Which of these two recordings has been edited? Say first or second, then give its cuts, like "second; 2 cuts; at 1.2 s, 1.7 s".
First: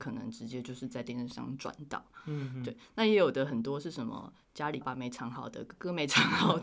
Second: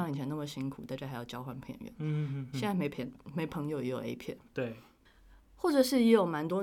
first; 1 cut; at 4.8 s